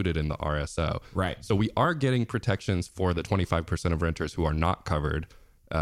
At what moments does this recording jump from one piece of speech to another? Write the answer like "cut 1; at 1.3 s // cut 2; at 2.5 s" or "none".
none